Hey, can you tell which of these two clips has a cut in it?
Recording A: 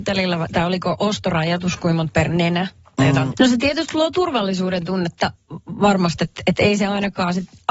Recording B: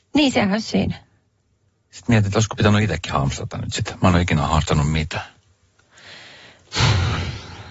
A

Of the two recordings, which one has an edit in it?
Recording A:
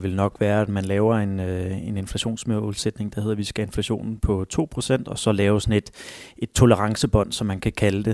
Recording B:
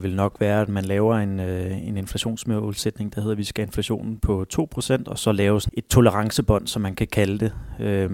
B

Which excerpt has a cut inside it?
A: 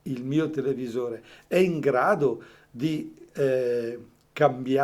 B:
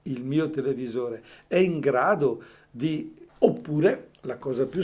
B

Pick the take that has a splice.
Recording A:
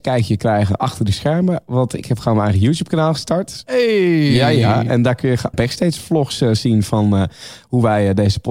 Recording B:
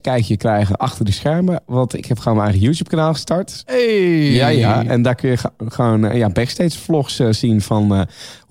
A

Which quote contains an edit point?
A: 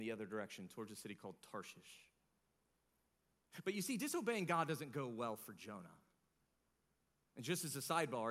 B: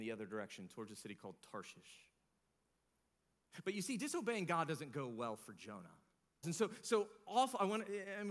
B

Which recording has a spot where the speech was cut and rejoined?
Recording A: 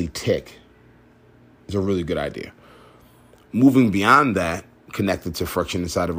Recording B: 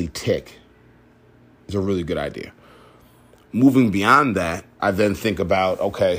B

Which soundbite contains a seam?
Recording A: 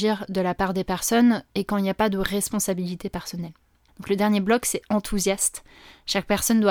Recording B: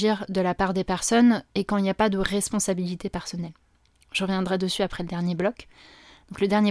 A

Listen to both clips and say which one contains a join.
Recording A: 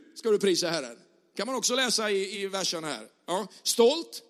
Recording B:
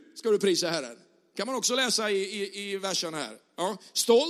A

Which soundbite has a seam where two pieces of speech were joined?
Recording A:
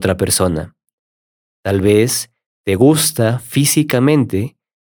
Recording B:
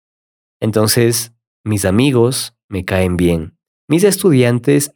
B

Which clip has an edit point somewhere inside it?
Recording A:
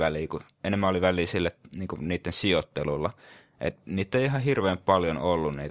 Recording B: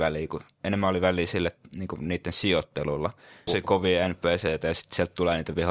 B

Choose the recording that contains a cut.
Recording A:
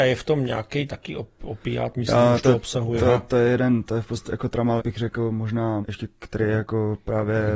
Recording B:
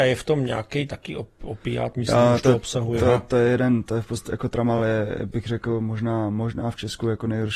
A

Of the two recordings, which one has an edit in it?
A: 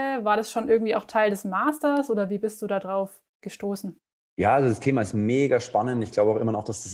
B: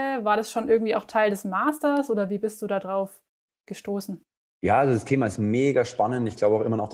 A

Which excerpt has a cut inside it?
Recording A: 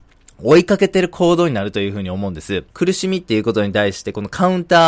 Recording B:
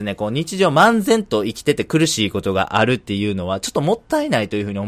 A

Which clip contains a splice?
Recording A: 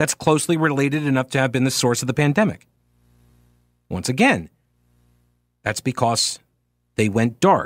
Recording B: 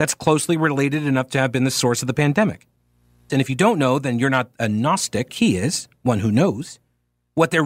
B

